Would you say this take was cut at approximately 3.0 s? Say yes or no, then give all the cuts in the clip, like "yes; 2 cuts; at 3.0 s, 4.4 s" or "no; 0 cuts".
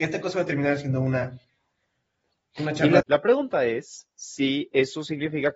yes; 1 cut; at 3.0 s